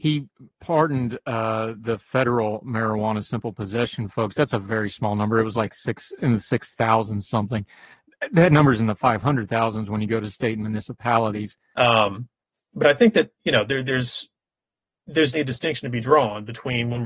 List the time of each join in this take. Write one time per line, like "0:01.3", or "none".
0:11.7
0:15.3